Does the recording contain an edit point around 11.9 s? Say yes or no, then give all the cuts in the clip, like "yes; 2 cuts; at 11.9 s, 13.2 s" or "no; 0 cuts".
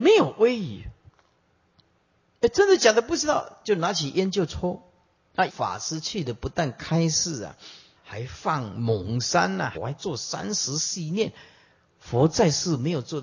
no; 3 cuts; at 5.5 s, 8.0 s, 9.7 s